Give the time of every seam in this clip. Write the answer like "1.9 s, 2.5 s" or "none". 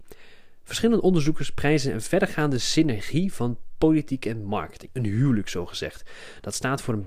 4.9 s